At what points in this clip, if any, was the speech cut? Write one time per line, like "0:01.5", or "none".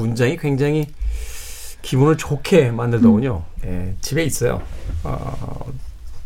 0:03.6